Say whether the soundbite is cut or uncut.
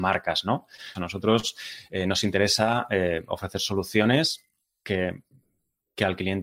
cut